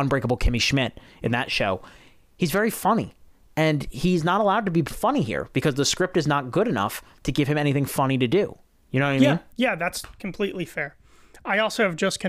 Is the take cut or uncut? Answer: uncut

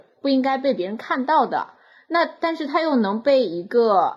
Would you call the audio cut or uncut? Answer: uncut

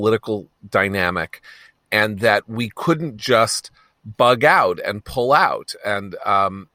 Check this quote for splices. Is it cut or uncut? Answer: uncut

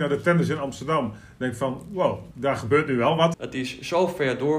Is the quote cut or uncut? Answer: cut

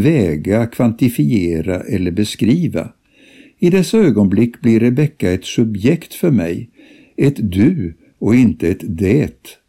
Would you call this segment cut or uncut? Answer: uncut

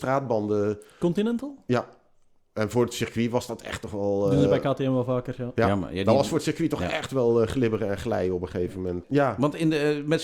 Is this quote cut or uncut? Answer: cut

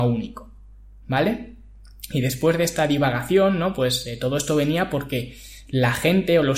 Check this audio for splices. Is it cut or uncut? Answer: uncut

